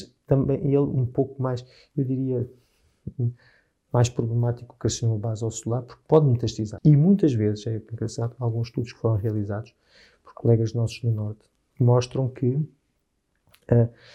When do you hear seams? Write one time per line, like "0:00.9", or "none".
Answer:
0:06.8